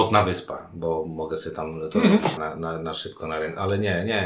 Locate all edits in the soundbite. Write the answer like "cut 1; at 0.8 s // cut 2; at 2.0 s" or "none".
cut 1; at 2.4 s

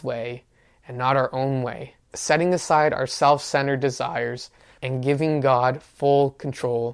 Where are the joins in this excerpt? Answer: cut 1; at 2.1 s // cut 2; at 4.8 s

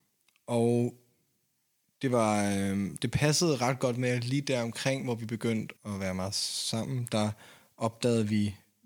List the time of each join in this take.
cut 1; at 5.8 s

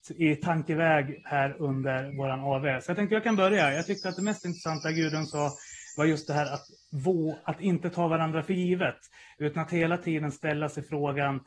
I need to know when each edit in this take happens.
none

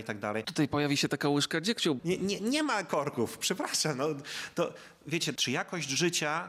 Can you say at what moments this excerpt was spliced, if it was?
cut 1; at 2.0 s // cut 2; at 5.4 s

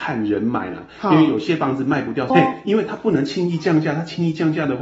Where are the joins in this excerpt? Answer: cut 1; at 2.3 s

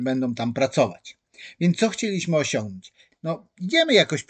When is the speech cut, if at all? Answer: cut 1; at 3.1 s

